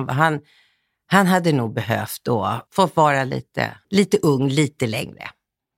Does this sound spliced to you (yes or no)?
yes